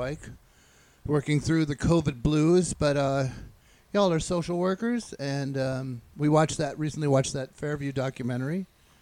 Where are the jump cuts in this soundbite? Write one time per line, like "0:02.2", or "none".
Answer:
none